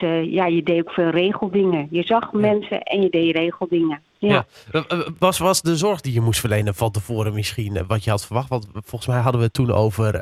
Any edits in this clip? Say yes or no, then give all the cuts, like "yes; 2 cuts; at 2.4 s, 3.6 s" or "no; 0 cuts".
no; 0 cuts